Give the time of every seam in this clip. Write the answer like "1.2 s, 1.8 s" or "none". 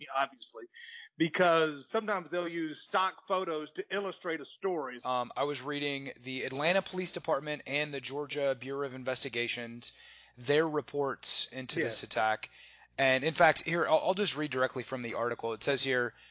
5.0 s